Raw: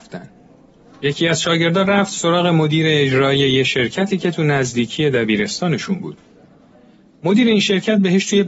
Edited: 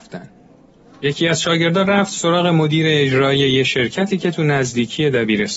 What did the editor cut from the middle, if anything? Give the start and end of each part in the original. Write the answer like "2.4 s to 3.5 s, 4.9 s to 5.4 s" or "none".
none